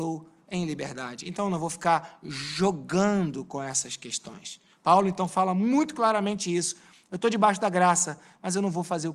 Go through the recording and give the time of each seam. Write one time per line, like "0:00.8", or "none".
none